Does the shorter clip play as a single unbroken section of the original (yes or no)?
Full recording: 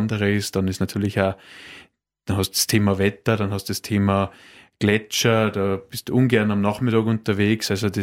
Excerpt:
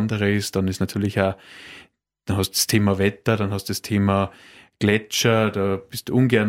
yes